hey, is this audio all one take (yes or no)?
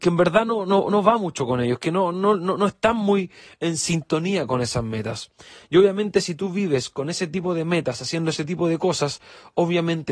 yes